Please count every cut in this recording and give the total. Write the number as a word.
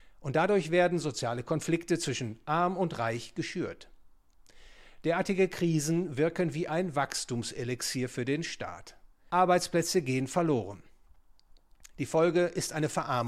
one